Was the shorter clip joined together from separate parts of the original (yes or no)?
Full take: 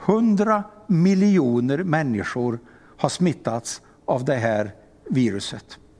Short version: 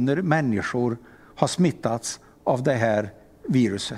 no